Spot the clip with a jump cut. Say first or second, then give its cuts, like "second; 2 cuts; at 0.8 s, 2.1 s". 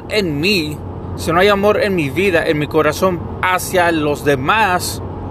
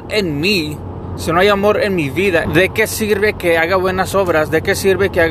second; 1 cut; at 2.5 s